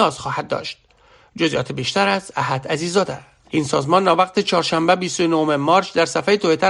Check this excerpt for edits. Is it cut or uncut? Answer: cut